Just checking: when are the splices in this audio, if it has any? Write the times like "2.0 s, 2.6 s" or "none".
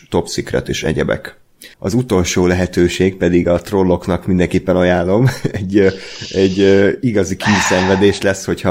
1.7 s